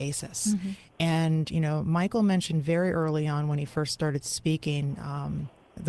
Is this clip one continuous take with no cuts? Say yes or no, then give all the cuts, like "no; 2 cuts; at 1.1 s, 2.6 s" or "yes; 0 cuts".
yes; 0 cuts